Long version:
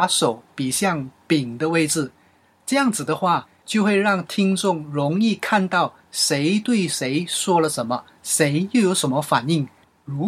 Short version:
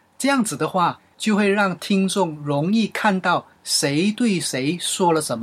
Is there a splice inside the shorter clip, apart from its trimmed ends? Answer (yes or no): no